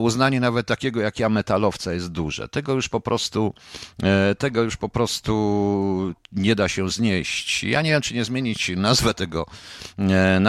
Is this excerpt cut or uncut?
uncut